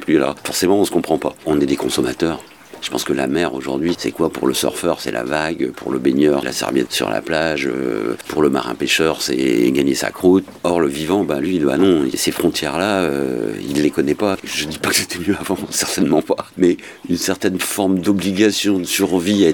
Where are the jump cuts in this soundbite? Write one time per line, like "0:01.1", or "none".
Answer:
0:06.4